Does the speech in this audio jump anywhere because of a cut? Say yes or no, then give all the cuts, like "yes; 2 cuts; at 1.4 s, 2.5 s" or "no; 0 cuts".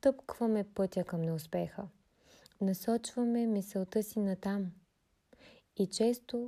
no; 0 cuts